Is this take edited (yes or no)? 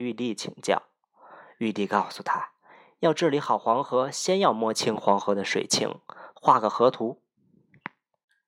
no